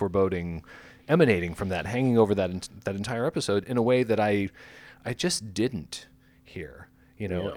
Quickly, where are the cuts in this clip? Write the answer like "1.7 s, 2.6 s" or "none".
none